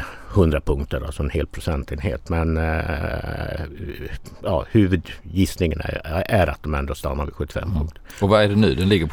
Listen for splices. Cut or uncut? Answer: uncut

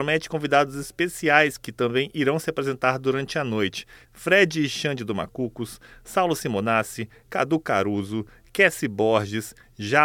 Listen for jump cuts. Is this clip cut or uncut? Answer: cut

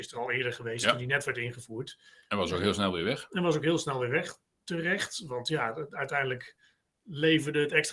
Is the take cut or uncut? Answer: uncut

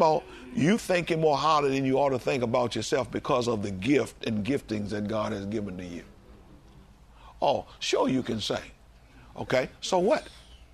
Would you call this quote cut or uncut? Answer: uncut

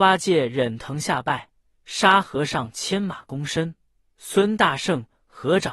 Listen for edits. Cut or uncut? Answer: uncut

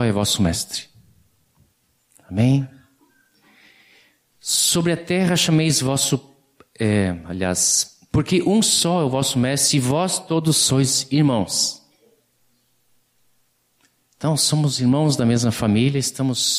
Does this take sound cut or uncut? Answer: uncut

